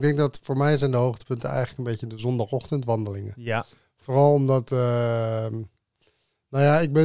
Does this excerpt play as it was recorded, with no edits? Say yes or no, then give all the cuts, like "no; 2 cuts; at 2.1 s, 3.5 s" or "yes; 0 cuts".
yes; 0 cuts